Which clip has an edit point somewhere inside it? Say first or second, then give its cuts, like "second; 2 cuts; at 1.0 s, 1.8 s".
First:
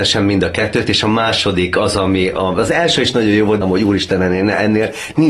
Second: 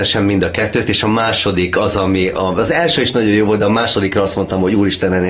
first; 1 cut; at 3.6 s